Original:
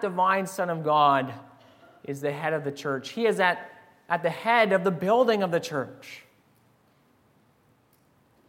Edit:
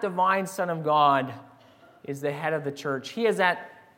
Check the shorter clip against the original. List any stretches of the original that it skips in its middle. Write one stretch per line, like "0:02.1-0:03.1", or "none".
none